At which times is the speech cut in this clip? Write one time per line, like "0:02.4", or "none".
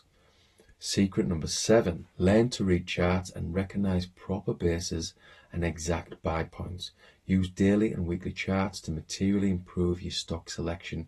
0:02.1